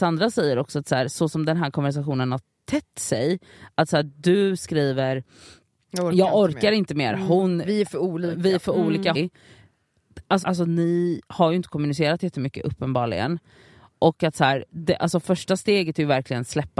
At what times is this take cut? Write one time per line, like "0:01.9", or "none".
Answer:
0:09.1
0:10.4